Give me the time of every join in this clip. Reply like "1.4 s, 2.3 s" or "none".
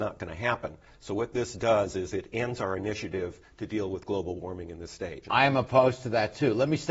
5.2 s